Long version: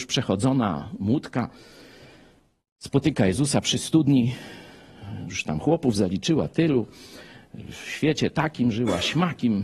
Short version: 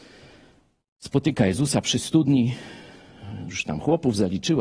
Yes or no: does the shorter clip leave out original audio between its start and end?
no